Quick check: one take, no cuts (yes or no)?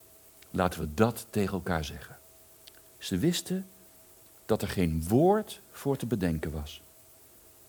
no